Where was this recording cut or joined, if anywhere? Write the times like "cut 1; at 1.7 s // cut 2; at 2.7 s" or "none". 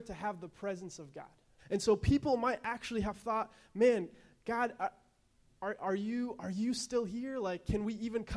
cut 1; at 1.6 s